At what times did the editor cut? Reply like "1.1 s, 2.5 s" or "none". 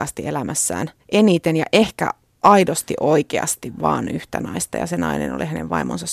1.0 s